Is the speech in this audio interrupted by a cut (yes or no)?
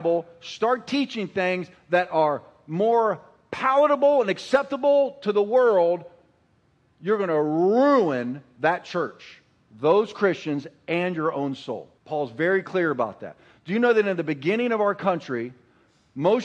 yes